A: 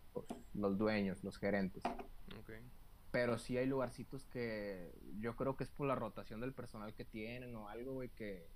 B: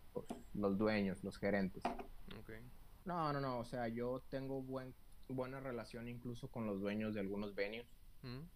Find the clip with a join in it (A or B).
B